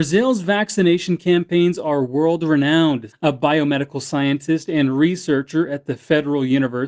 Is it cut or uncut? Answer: cut